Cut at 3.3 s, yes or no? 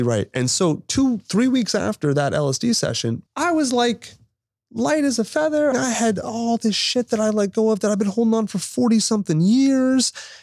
yes